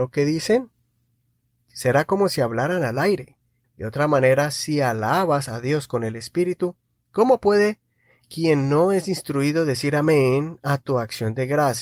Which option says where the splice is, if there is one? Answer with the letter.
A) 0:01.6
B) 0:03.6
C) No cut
B